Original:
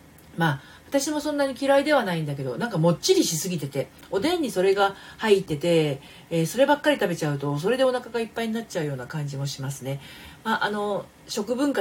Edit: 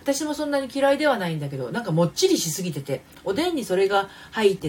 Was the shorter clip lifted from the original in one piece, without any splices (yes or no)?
yes